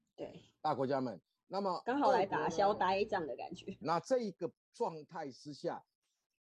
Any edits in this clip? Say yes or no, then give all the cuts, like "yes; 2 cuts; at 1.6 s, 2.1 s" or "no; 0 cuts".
yes; 1 cut; at 3.8 s